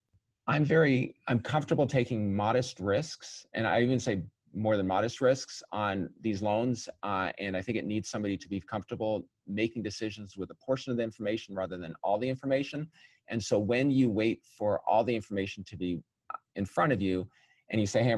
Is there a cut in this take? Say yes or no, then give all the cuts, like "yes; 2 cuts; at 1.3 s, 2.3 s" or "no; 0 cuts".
no; 0 cuts